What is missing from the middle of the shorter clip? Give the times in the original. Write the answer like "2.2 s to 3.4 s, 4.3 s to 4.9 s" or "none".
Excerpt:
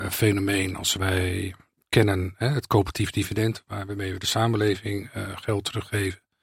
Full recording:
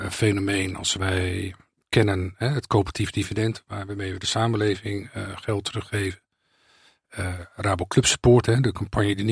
none